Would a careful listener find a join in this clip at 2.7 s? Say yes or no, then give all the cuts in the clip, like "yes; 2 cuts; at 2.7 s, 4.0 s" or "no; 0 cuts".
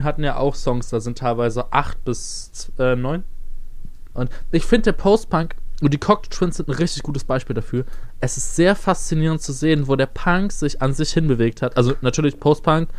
no; 1 cut; at 4.1 s